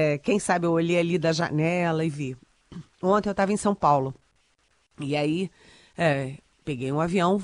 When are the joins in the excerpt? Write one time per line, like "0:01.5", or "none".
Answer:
none